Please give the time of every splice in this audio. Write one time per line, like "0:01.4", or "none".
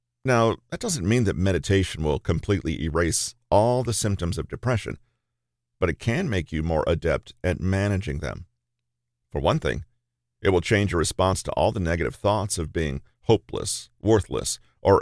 none